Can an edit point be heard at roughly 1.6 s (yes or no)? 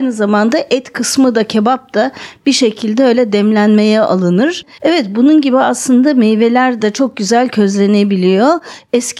no